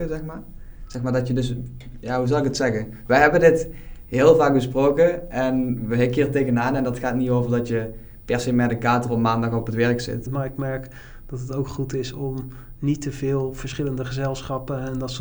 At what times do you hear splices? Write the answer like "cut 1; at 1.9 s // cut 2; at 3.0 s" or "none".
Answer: cut 1; at 10.3 s